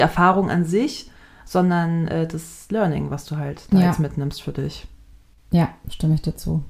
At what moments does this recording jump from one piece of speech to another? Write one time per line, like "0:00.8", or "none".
none